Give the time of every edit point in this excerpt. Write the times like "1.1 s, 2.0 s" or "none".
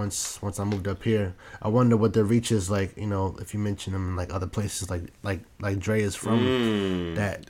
none

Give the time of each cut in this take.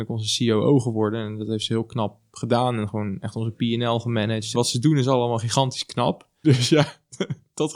4.5 s, 6.4 s

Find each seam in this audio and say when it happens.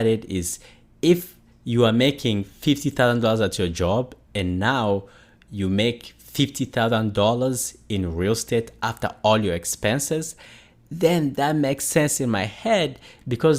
none

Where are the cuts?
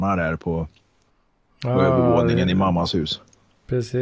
none

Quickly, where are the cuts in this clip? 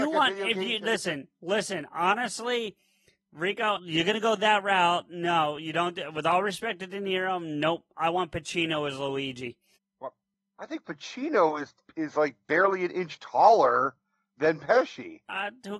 3.8 s

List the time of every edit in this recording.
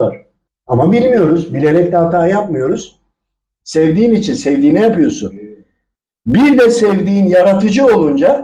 3.6 s

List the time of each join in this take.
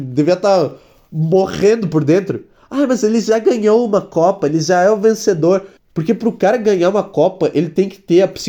5.8 s

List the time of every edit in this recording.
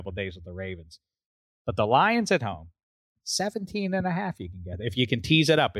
none

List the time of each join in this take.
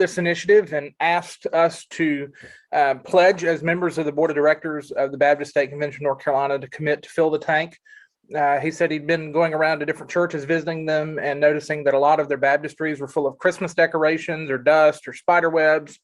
none

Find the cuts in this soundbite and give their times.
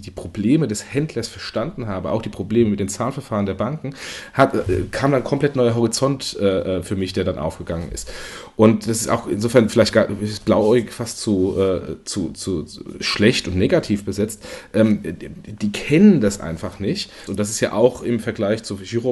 17.3 s

